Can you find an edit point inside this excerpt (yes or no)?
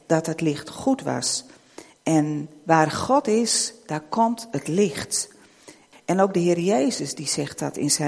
yes